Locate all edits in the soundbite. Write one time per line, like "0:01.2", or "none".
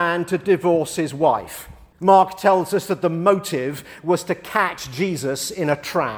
0:01.9